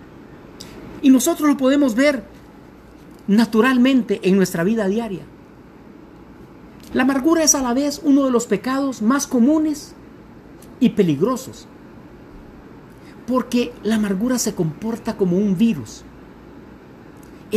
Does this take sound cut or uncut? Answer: cut